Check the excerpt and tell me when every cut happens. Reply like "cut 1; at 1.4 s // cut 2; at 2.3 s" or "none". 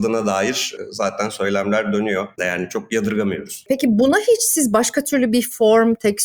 cut 1; at 2.4 s // cut 2; at 3.7 s